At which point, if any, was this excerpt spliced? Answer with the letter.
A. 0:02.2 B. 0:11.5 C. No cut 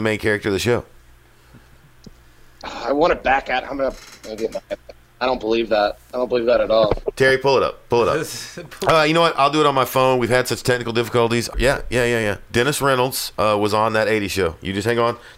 B